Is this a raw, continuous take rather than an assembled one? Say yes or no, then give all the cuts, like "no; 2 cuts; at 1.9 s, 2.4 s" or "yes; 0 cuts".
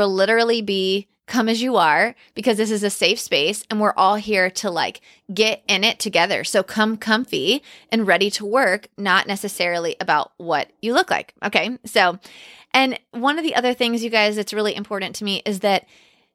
yes; 0 cuts